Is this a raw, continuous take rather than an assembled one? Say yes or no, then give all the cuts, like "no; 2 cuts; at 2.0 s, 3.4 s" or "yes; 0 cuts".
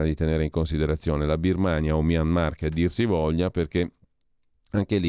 yes; 0 cuts